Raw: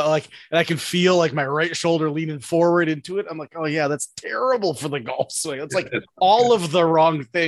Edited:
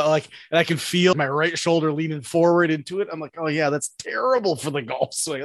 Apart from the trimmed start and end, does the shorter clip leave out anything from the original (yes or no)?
yes